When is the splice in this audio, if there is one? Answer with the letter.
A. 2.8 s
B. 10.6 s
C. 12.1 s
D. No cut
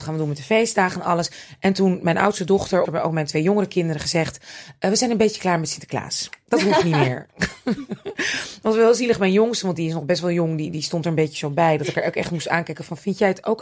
A